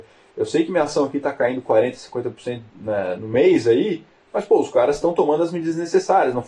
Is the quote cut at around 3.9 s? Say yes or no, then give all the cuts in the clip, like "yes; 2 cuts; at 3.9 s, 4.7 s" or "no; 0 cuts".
no; 1 cut; at 2.7 s